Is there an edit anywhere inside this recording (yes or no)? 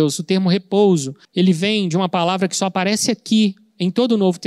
yes